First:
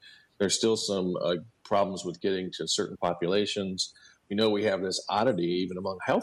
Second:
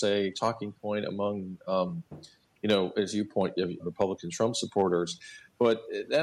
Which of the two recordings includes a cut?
second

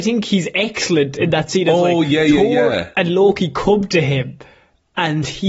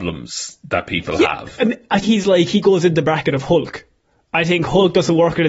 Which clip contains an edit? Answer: second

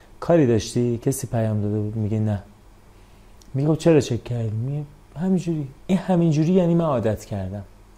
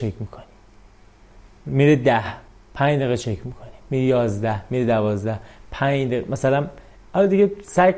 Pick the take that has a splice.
first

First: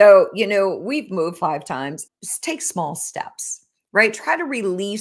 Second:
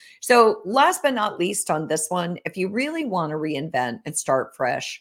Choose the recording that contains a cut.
first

